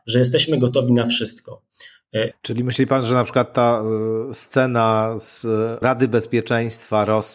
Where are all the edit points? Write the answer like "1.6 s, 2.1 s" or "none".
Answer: 2.3 s, 5.8 s